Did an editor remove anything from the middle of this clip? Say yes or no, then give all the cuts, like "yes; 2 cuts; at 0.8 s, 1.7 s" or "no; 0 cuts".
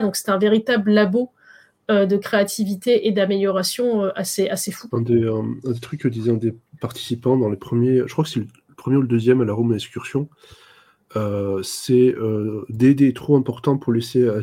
yes; 1 cut; at 4.9 s